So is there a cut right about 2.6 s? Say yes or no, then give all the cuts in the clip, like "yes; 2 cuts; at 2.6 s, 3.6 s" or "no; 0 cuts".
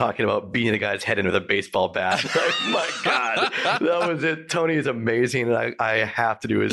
no; 0 cuts